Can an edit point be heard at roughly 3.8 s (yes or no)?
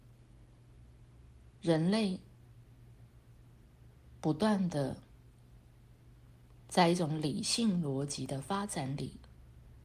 no